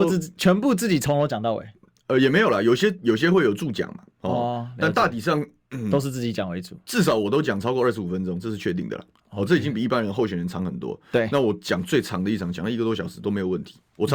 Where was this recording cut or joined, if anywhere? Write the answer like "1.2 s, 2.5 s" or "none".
none

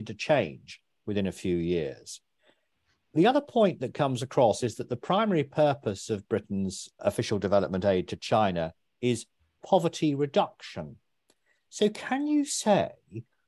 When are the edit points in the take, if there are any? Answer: 7.0 s

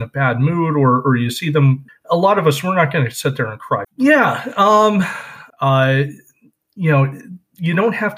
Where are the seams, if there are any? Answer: 1.9 s, 3.8 s, 5.5 s

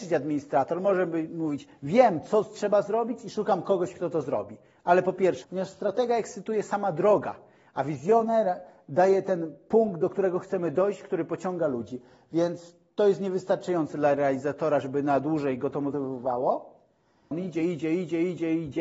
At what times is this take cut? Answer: 5.4 s, 17.3 s

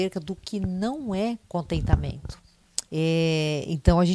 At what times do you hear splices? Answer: 2.9 s

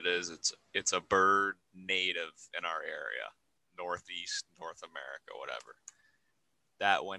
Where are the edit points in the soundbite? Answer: 3.6 s

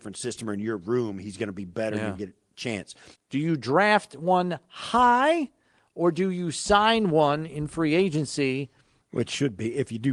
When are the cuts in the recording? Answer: 3.2 s, 9.0 s

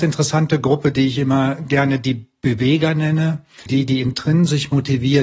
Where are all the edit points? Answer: 3.7 s

